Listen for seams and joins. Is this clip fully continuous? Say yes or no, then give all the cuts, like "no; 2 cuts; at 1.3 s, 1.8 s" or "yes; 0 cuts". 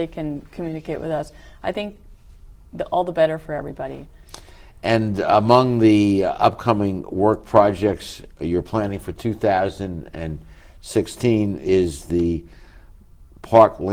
yes; 0 cuts